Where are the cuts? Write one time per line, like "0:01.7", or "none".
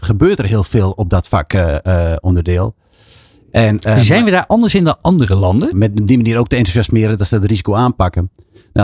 0:05.7